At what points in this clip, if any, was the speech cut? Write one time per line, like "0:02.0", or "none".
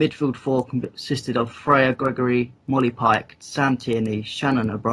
none